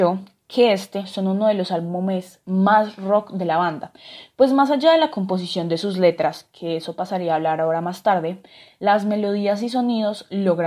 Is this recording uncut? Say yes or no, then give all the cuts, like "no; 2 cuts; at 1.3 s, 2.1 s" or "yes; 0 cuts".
no; 1 cut; at 1.0 s